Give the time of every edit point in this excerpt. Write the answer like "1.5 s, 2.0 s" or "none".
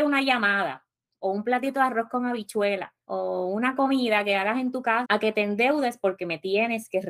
3.0 s, 5.0 s